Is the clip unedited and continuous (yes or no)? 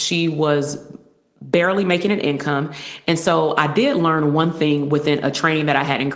yes